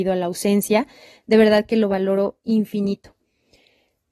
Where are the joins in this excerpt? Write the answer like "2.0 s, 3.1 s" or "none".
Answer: none